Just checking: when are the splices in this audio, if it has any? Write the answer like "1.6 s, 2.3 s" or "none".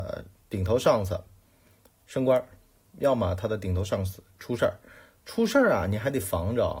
none